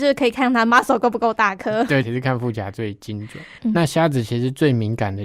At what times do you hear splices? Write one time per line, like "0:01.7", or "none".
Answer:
0:02.0
0:03.6